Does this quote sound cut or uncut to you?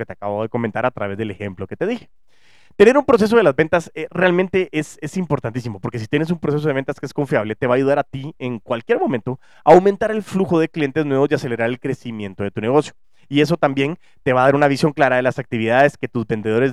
uncut